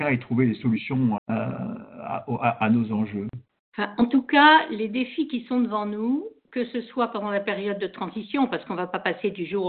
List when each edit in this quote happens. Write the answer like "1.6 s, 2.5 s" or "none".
1.2 s